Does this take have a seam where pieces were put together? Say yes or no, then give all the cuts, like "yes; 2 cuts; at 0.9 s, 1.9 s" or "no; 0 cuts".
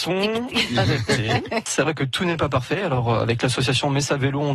yes; 1 cut; at 1.7 s